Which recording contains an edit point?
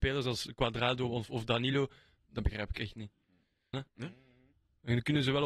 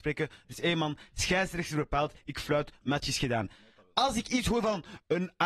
first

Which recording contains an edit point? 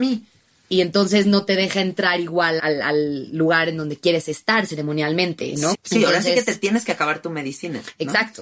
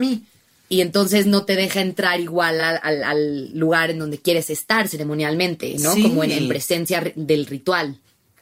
first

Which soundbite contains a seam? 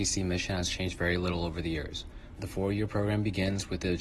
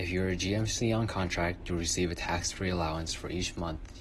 first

